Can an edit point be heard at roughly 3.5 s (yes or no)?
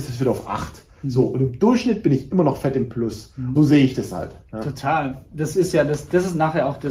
yes